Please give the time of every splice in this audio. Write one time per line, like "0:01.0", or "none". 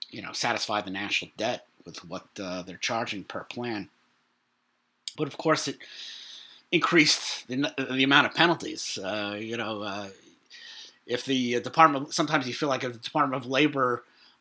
0:05.1